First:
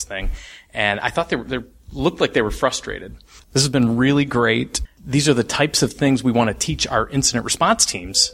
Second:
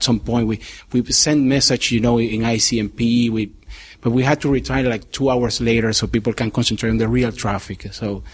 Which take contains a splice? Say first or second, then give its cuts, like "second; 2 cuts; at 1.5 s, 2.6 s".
first; 2 cuts; at 3.4 s, 4.9 s